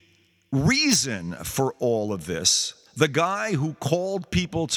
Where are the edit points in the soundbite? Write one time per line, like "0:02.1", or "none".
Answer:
none